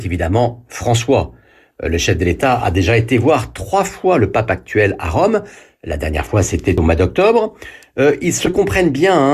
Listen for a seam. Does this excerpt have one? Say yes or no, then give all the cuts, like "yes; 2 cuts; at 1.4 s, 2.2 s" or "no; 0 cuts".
no; 0 cuts